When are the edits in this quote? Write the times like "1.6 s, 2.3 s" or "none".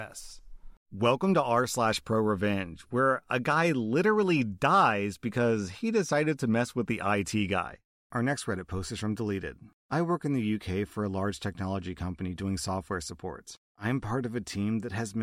none